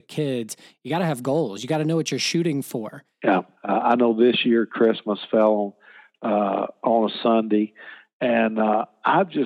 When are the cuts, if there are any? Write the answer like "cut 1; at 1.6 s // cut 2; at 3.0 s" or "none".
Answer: cut 1; at 3.5 s

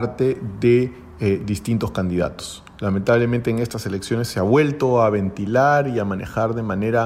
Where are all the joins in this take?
none

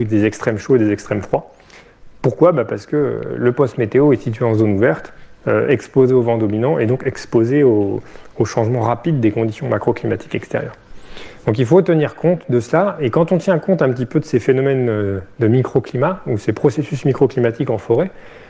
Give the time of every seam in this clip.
cut 1; at 11.4 s

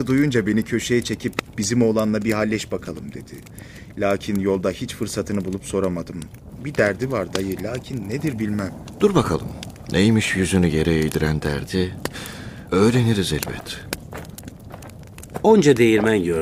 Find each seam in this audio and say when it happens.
none

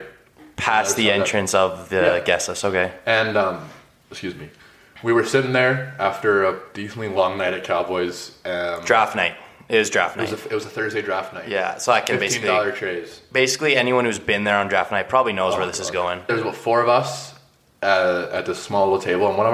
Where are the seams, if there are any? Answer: cut 1; at 16.3 s

